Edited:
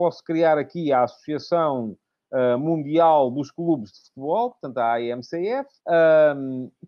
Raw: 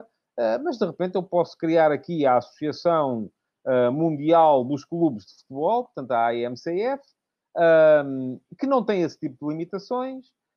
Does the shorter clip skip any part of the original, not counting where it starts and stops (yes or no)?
yes